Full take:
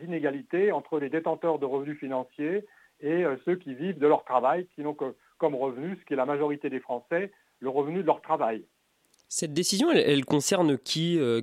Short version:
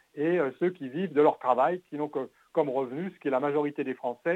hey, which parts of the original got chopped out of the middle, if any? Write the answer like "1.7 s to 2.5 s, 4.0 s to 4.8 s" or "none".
none